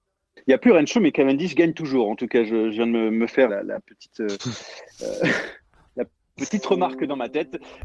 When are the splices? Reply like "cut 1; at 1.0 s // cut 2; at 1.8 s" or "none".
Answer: cut 1; at 3.5 s